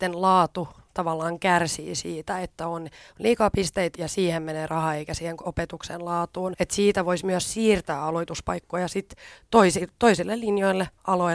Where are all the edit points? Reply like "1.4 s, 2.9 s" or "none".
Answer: 3.9 s, 6.5 s

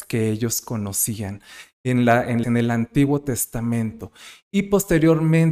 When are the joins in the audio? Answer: 2.4 s

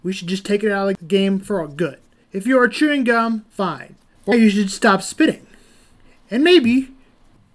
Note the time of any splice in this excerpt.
4.3 s

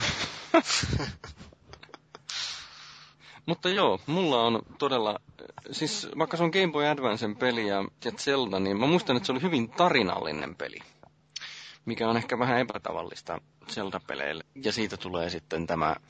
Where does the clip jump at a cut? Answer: 14.4 s

